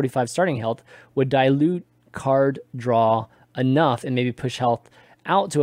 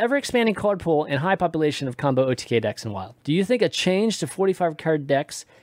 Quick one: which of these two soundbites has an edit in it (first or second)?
second